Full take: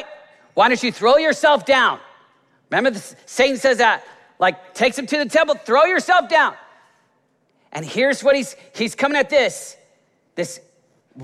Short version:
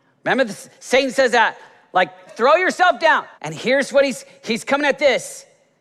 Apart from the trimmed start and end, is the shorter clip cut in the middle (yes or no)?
yes